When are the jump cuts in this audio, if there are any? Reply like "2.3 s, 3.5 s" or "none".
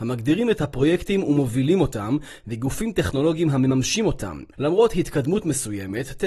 4.5 s